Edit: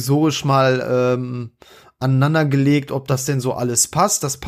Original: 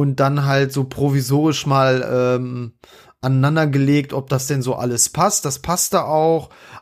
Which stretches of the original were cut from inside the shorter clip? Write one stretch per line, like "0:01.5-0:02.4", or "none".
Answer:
none

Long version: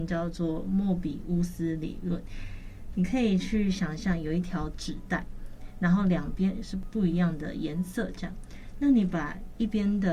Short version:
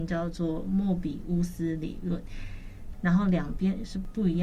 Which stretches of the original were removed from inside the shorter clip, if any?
0:02.9-0:05.7

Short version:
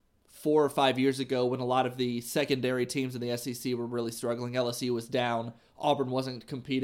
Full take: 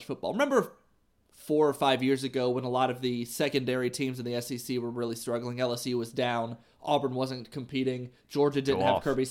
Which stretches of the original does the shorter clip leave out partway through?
none

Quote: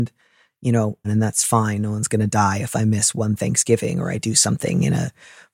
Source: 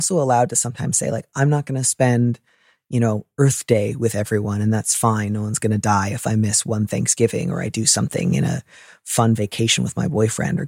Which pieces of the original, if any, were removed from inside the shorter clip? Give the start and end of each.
0:03.3-0:04.6

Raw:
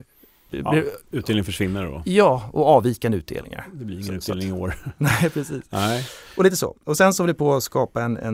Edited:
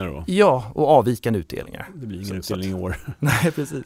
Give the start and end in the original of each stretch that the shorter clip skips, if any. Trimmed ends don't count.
none

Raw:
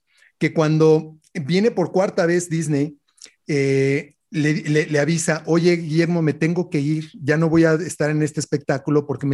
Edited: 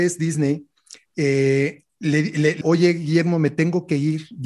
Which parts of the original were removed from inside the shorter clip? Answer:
0:04.9-0:05.4

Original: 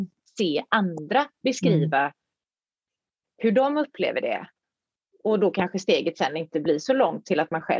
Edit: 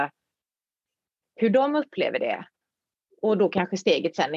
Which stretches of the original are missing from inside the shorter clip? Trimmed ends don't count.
none

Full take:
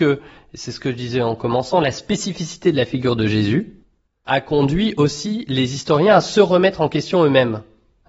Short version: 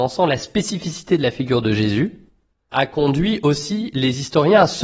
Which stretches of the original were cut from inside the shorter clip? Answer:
none

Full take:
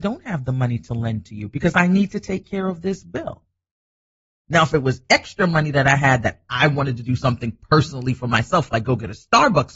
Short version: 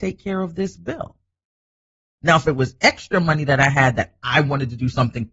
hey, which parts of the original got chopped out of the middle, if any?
none

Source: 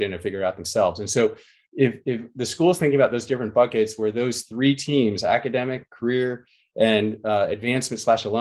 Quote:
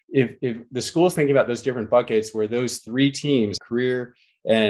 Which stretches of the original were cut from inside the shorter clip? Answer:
0:05.2-0:05.9

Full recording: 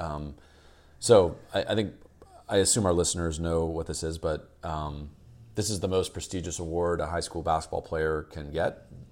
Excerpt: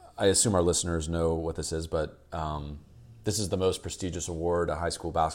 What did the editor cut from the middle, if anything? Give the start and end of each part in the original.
none

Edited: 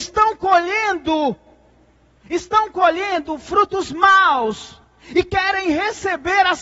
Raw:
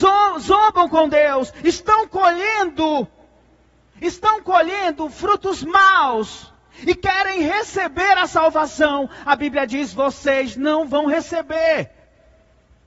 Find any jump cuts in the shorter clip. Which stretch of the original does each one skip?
none

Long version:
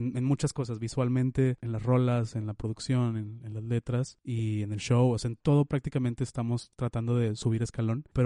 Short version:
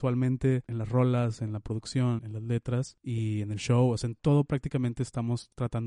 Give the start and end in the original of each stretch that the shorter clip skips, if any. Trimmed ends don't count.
0:03.1-0:03.4

